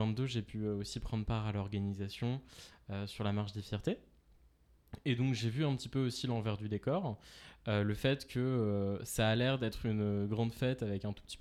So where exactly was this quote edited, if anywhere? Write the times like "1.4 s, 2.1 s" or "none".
none